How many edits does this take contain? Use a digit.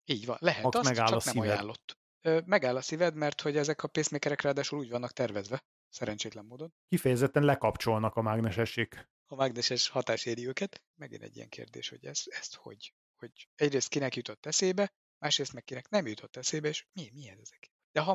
0